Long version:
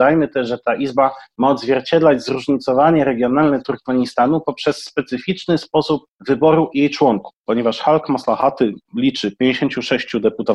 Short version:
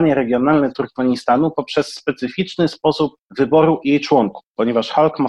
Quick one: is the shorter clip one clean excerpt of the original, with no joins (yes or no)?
yes